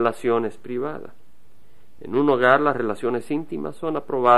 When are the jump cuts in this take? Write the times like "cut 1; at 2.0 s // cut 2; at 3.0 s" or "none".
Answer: cut 1; at 2.0 s